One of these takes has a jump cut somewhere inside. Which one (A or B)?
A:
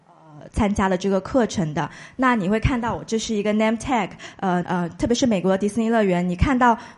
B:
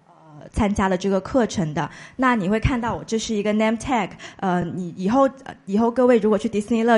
A